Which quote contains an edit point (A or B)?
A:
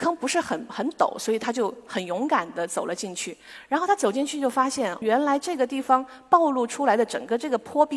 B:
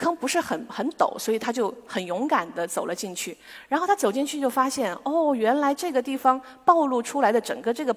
A